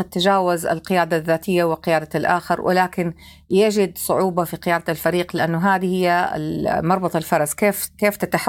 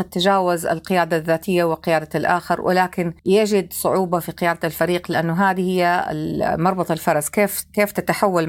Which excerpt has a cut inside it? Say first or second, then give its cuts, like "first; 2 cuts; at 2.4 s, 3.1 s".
second; 1 cut; at 3.2 s